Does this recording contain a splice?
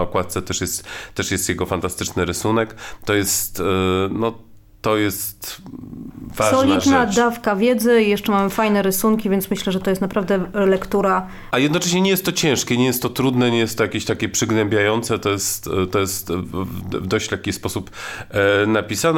no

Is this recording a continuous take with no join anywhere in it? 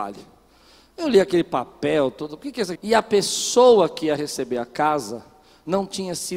no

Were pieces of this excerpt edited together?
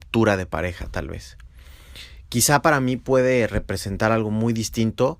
no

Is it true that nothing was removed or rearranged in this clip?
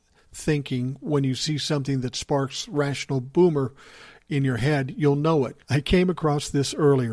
no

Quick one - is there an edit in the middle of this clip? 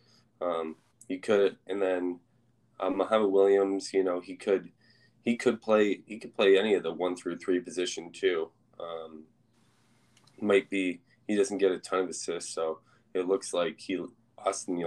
no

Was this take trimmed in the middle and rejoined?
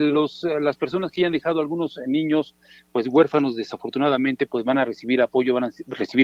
no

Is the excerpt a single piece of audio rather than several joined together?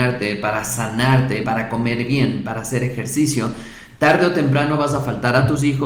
no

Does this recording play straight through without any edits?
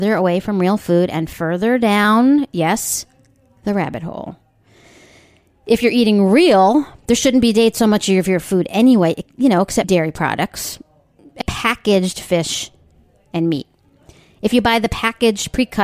no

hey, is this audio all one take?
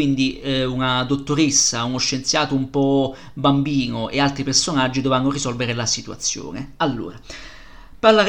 yes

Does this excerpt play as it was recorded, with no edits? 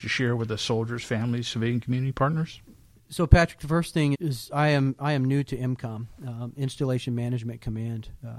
no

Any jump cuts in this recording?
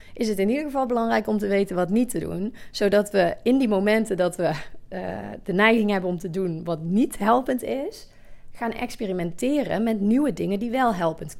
no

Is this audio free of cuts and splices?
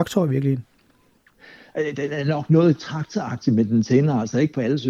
yes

